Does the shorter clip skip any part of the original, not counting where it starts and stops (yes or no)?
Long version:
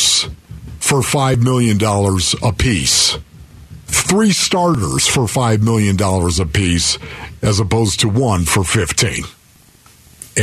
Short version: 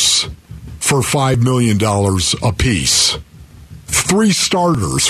no